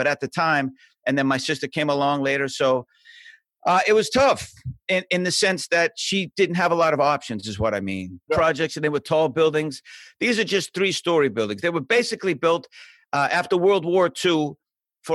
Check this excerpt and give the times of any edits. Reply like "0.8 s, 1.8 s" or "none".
8.3 s